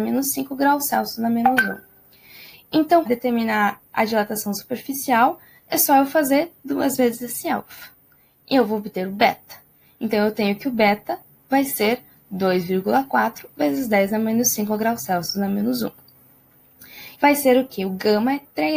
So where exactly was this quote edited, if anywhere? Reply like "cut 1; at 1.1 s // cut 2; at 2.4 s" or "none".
cut 1; at 3.0 s // cut 2; at 17.1 s